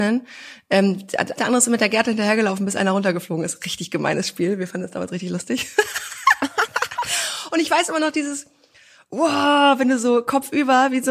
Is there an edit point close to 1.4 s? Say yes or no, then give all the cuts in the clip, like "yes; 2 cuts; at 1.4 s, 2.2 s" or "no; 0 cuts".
yes; 1 cut; at 1.4 s